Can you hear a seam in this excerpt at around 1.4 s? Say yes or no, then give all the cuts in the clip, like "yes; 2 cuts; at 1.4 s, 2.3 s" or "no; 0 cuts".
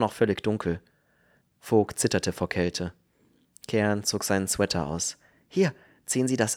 yes; 1 cut; at 1.4 s